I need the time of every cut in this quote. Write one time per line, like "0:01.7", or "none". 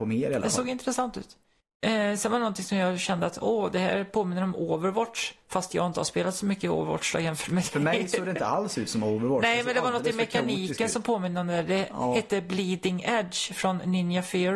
none

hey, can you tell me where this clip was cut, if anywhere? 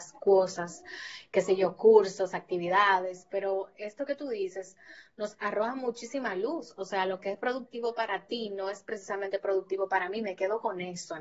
none

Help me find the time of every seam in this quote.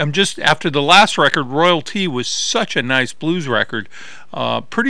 none

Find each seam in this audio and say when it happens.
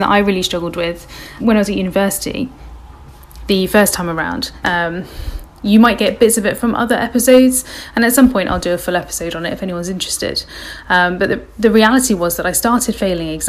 0:01.4
0:04.6

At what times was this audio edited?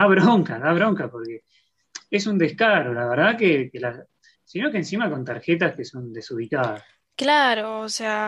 0:04.3

